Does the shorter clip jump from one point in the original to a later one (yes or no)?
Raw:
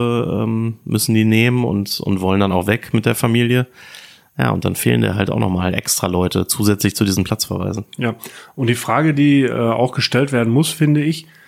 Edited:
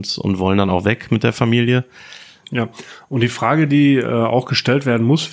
yes